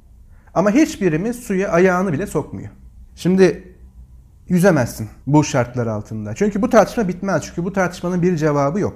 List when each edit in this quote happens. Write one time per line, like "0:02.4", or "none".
0:03.1
0:05.2